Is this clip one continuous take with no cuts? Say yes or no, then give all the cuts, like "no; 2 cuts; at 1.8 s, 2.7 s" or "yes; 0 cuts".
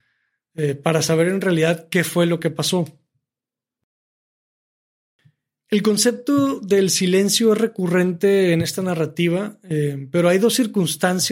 yes; 0 cuts